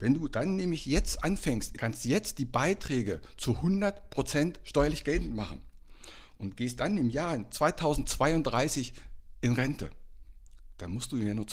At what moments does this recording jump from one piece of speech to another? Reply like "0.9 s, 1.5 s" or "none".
1.7 s